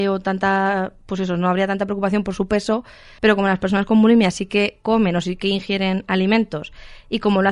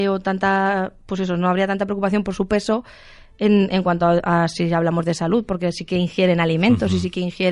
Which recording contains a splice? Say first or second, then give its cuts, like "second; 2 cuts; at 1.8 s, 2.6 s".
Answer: first; 1 cut; at 3.2 s